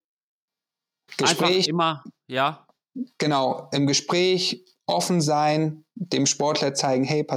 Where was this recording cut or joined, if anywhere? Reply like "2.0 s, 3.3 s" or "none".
1.1 s